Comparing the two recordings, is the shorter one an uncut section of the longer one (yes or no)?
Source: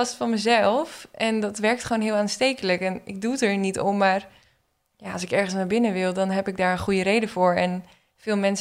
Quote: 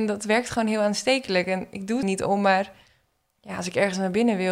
no